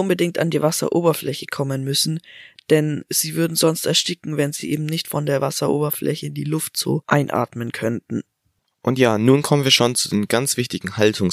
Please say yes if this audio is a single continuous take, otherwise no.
yes